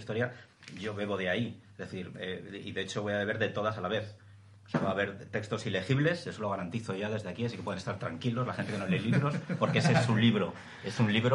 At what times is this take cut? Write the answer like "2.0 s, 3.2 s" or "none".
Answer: none